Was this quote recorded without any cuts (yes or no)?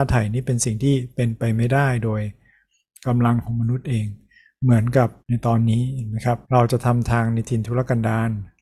no